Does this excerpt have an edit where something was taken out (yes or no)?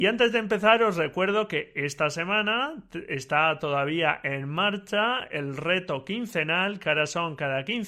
no